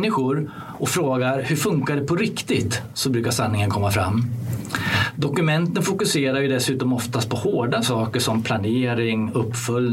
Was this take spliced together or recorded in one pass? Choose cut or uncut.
uncut